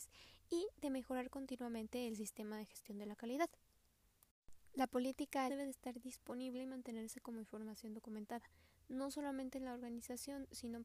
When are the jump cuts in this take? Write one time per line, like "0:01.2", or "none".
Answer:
0:05.5